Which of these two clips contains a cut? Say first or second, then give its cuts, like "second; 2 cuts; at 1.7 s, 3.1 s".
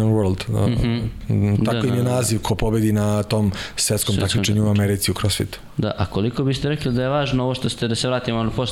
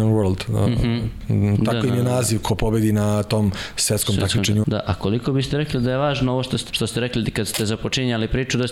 second; 2 cuts; at 4.6 s, 6.7 s